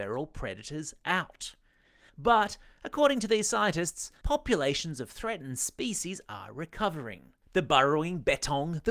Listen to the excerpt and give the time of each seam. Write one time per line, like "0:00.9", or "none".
0:02.1
0:04.2
0:07.4